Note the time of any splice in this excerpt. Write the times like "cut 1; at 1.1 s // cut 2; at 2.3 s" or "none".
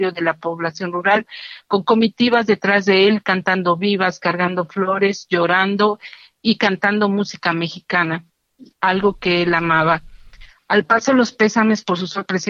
none